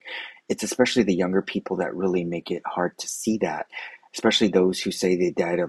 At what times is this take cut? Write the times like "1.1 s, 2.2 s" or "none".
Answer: none